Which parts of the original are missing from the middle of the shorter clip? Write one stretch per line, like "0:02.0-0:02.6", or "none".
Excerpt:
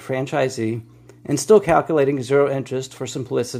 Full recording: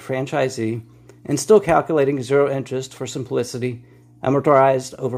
none